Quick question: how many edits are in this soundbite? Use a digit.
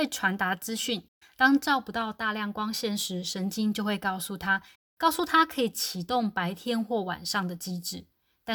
2